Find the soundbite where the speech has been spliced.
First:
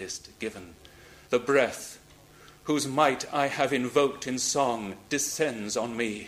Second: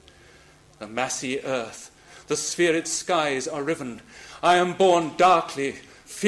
first; 1 cut; at 1.2 s

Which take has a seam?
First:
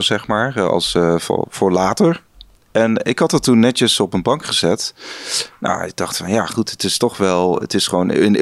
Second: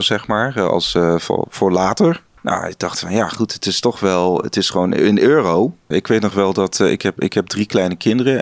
second; 2 cuts; at 2.4 s, 5.9 s

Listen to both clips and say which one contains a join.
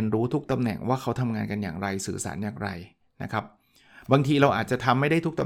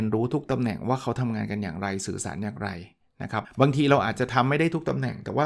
second; 1 cut; at 3.4 s

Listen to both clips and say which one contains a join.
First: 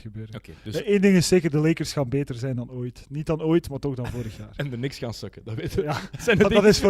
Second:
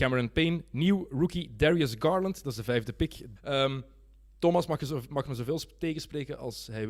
second; 1 cut; at 3.4 s

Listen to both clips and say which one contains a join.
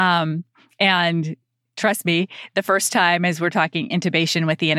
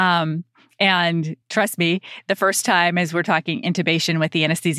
second; 1 cut; at 1.4 s

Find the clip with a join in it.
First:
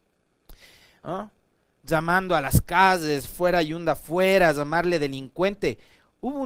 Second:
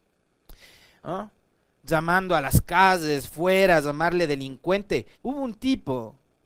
second; 2 cuts; at 3.3 s, 5.1 s

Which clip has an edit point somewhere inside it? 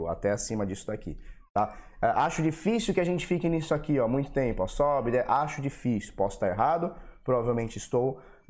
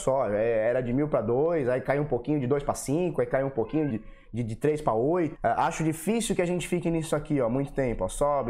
second; 2 cuts; at 3.9 s, 5.3 s

